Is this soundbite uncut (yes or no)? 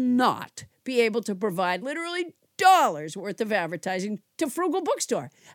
yes